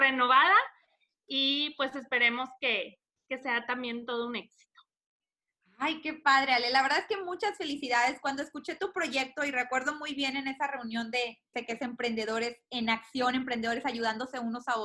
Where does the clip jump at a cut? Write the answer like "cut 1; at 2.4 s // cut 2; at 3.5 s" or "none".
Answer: cut 1; at 11.5 s